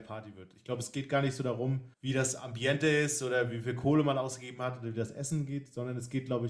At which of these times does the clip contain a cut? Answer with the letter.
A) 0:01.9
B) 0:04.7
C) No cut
A